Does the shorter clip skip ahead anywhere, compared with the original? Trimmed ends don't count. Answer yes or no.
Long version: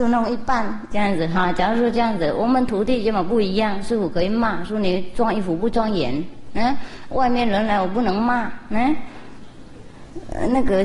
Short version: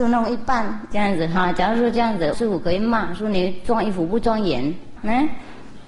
yes